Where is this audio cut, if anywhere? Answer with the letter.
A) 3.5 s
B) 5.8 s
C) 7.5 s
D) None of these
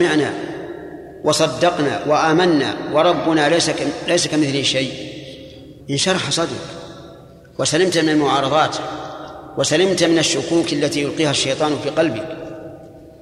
B